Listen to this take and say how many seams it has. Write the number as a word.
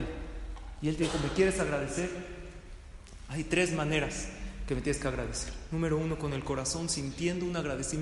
zero